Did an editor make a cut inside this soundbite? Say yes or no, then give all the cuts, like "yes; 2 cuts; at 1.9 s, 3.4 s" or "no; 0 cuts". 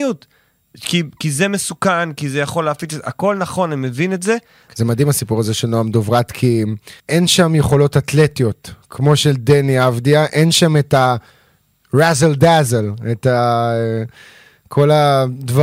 yes; 2 cuts; at 4.7 s, 7.0 s